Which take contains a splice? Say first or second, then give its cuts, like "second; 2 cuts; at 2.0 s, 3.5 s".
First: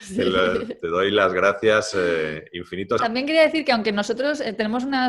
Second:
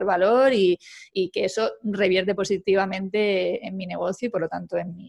first; 1 cut; at 3.0 s